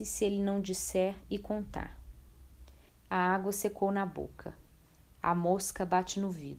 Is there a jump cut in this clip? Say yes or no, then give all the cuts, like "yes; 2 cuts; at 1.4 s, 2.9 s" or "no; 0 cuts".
yes; 1 cut; at 2.9 s